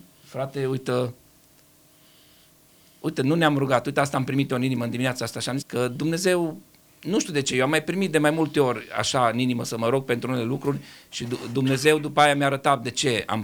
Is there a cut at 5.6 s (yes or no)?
yes